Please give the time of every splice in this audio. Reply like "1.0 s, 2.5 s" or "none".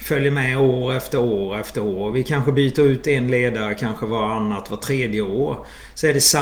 none

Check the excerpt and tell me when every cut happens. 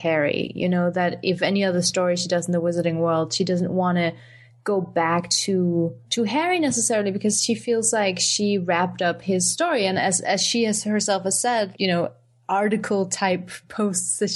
6.0 s, 11.7 s

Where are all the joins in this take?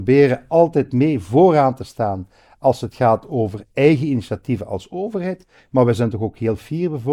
none

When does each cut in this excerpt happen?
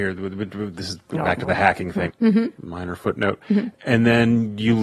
2.1 s

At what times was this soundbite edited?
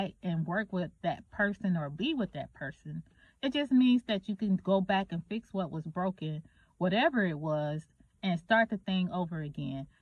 none

